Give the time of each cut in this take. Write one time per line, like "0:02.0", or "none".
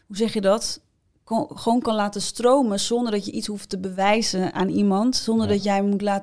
none